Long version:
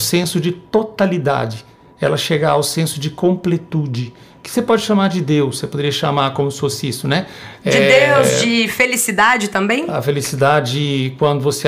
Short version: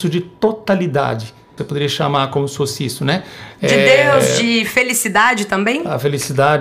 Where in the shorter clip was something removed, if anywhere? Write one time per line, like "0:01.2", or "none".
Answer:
0:01.6